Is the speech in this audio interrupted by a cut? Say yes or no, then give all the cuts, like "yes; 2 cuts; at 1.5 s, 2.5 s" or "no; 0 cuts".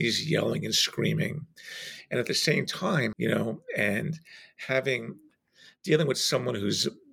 yes; 1 cut; at 3.1 s